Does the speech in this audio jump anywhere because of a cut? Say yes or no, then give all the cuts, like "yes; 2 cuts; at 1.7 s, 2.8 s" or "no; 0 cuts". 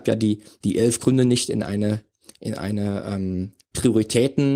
no; 0 cuts